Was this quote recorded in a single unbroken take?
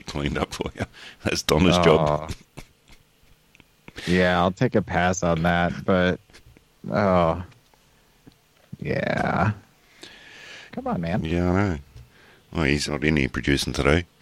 no; 2 cuts; at 10.7 s, 12.9 s

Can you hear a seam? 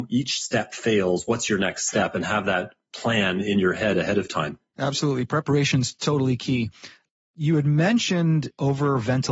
no; 0 cuts

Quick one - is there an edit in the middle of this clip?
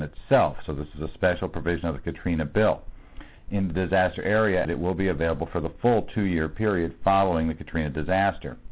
yes; 1 cut; at 4.6 s

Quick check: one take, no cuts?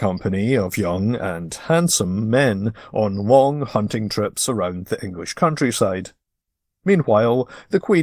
yes; 0 cuts

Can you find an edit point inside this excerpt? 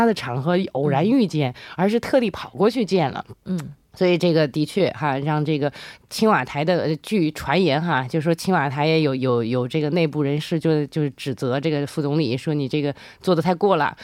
no; 0 cuts

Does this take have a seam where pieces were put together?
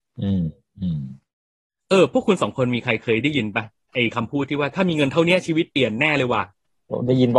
no; 0 cuts

